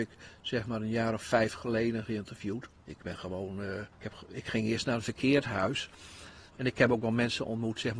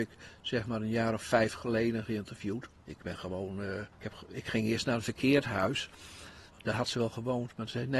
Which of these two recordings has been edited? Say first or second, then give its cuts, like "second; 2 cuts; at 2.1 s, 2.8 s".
first; 1 cut; at 6.5 s